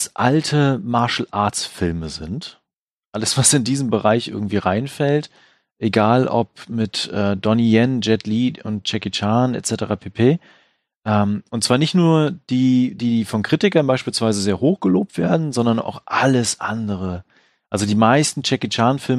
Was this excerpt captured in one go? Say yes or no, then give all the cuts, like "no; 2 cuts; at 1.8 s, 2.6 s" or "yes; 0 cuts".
yes; 0 cuts